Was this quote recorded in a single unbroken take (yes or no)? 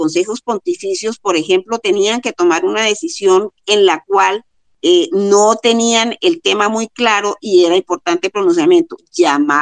yes